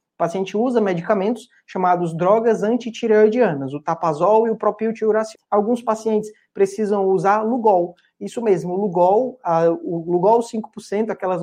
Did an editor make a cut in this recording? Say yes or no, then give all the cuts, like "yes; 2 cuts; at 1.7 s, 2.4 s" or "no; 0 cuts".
yes; 1 cut; at 5.3 s